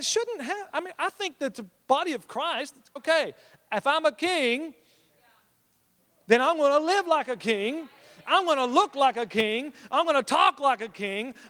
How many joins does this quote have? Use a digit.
1